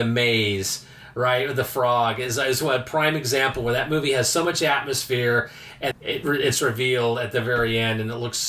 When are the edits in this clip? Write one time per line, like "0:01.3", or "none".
0:05.9